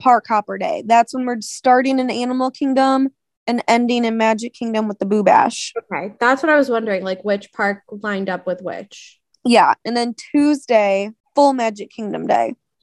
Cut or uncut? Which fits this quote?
cut